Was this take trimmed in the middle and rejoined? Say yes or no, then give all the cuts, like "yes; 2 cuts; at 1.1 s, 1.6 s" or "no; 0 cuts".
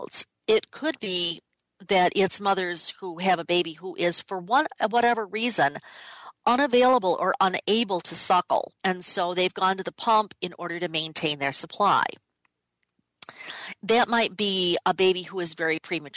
yes; 1 cut; at 8.8 s